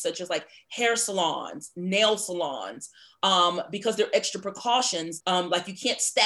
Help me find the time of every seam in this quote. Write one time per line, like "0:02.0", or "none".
0:05.2